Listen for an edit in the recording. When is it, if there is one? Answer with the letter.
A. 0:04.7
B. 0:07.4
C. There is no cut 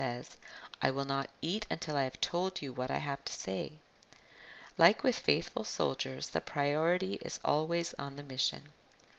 C